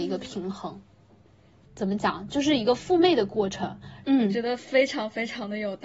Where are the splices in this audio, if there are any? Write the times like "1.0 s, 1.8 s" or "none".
1.7 s, 4.0 s

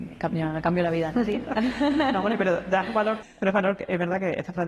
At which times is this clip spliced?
3.2 s

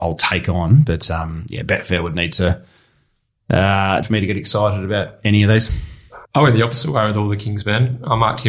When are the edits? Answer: 4.0 s, 6.2 s

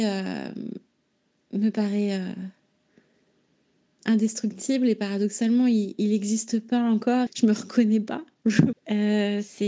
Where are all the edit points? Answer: 7.3 s, 8.7 s

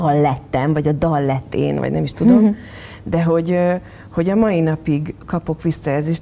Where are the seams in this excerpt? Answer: none

